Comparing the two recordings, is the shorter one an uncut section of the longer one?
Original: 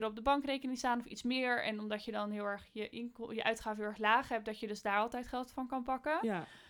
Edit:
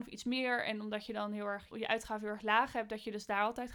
no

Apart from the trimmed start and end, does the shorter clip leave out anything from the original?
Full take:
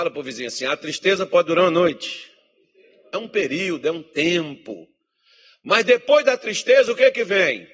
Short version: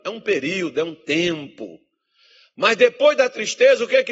no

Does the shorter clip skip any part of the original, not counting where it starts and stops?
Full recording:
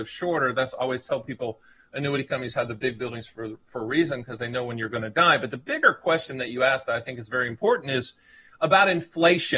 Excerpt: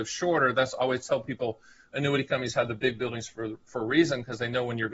no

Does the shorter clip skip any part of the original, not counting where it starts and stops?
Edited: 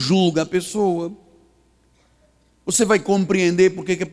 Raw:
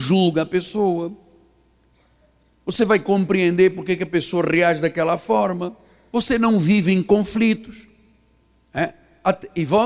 no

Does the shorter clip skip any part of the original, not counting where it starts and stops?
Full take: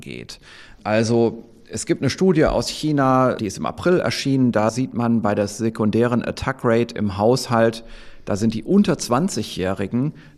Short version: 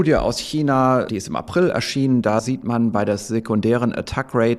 no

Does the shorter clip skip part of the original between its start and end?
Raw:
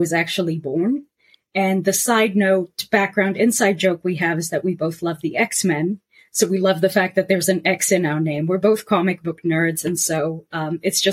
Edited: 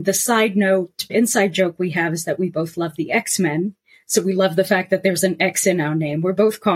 yes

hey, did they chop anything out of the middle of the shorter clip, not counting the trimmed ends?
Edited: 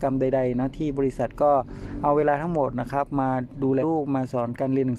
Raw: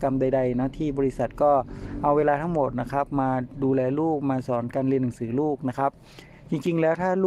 yes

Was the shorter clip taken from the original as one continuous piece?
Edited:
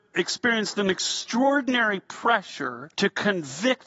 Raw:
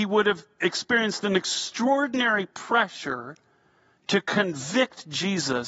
no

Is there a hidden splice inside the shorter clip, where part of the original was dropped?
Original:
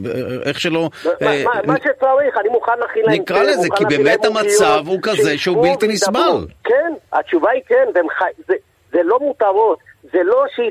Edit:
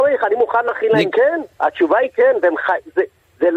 yes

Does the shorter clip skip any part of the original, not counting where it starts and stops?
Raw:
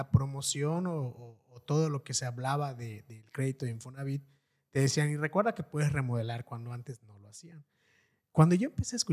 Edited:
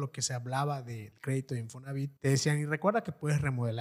yes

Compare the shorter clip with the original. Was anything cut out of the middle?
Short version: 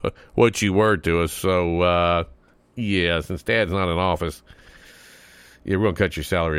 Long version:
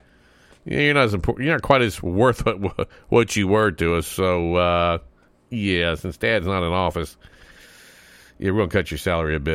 no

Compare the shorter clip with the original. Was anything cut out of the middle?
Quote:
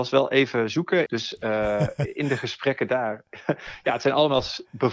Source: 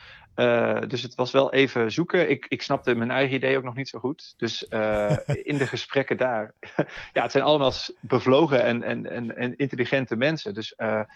yes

